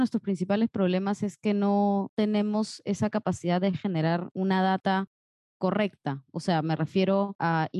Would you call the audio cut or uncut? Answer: uncut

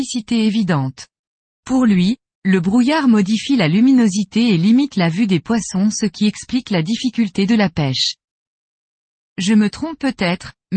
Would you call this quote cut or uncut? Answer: uncut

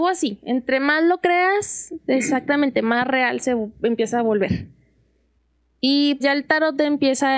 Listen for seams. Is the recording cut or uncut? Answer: cut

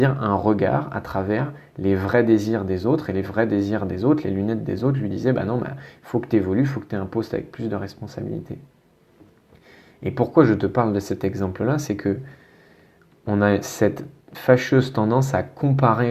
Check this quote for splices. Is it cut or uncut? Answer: uncut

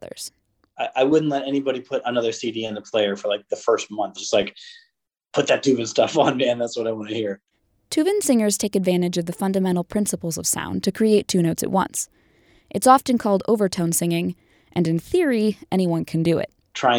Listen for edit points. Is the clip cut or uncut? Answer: uncut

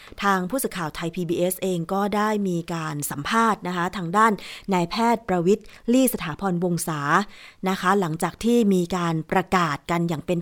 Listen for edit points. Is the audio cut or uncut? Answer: uncut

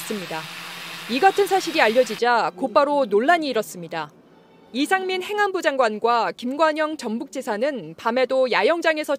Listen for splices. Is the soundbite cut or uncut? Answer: uncut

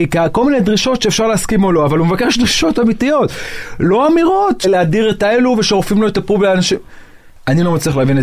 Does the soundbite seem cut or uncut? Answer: cut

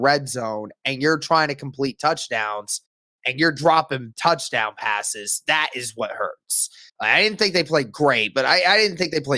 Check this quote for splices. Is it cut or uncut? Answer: cut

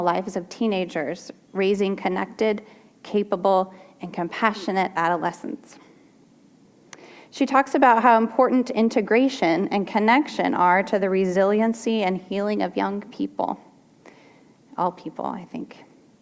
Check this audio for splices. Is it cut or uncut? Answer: uncut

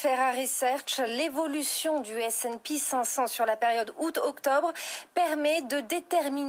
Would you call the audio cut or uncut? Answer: uncut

